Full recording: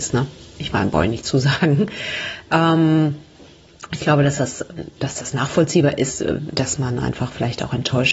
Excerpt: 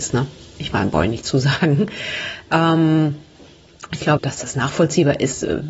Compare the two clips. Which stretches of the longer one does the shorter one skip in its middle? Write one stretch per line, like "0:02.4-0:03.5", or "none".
0:04.2-0:04.9